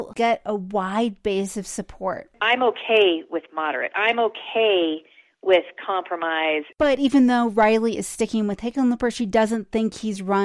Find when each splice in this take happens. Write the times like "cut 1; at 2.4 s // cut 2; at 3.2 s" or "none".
none